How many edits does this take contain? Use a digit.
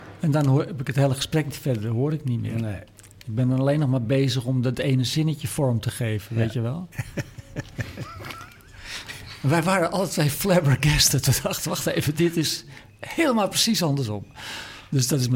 1